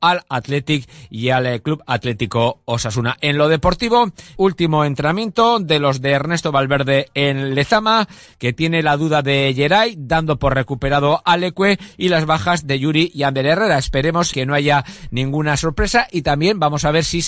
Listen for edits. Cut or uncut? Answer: cut